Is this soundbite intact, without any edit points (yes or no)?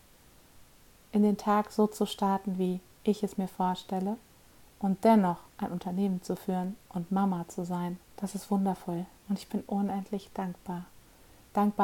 no